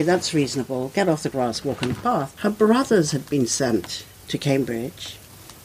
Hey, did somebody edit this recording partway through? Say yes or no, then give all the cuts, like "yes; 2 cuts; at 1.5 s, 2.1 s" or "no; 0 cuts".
yes; 1 cut; at 2.4 s